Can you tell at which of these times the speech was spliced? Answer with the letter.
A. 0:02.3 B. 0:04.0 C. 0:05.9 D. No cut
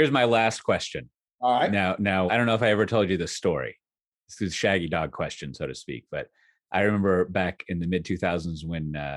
A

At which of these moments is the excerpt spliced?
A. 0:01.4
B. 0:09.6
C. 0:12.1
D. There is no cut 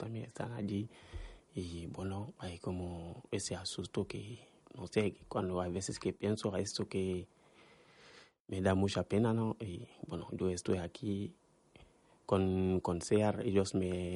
A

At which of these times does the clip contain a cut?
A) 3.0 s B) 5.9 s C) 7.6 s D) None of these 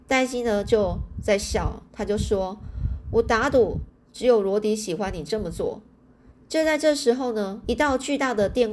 C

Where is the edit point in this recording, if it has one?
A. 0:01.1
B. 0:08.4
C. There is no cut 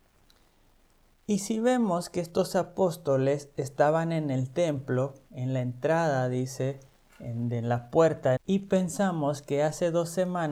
B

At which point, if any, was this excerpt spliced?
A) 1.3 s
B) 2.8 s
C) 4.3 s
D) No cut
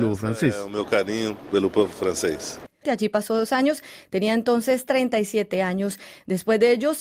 B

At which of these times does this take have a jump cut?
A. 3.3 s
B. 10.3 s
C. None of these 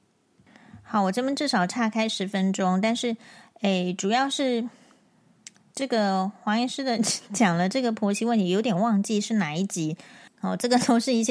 B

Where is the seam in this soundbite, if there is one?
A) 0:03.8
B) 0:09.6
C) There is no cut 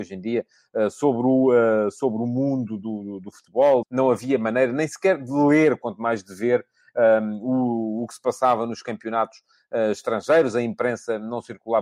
A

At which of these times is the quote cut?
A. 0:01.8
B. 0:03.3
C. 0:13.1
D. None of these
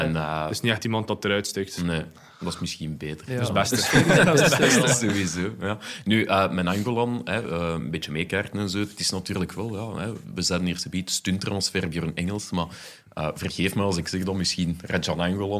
D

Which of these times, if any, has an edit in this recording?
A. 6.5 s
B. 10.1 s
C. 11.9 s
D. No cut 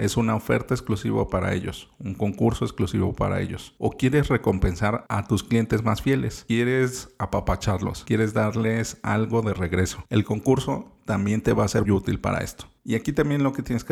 C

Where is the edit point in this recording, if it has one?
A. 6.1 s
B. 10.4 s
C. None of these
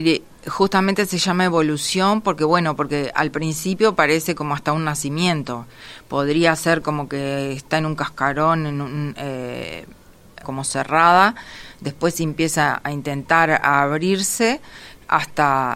B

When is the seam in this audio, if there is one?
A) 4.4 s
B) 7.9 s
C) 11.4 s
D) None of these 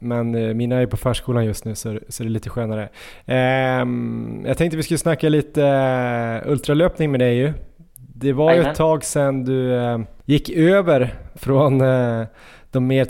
C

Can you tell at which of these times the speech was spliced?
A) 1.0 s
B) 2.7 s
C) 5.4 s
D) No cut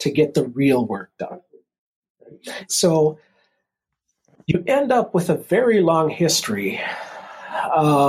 B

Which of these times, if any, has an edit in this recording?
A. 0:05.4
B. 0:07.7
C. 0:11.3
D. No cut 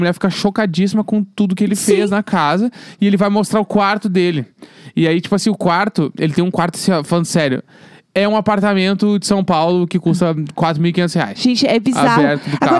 C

